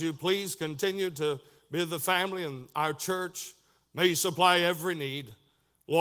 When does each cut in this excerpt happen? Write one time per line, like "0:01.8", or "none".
none

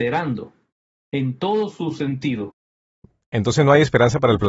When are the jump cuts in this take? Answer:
none

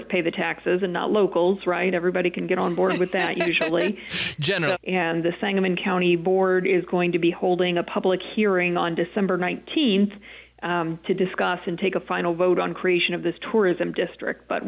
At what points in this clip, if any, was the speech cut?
0:04.7

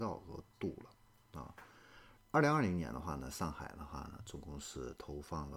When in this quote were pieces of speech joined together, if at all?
0:02.2

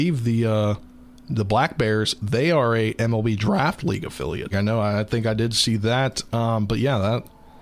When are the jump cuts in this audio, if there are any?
0:04.5

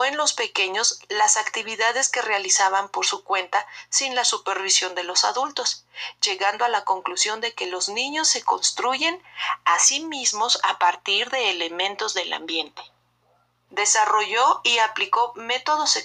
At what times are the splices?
0:13.7

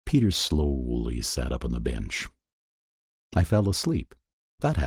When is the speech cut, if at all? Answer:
none

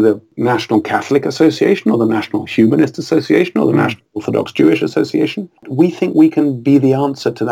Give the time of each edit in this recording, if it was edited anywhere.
0:05.6

